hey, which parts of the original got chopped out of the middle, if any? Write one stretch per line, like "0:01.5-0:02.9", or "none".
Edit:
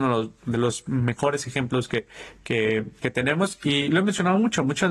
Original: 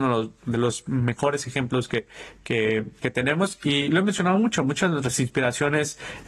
none